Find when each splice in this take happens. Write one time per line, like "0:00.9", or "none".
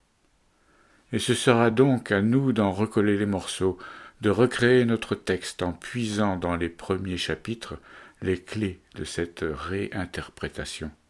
none